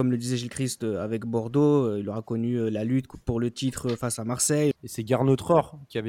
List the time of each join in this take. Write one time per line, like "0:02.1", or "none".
0:04.7